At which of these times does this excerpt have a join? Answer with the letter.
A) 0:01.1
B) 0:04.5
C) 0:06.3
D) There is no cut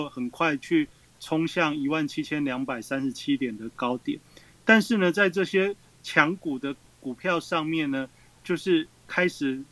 D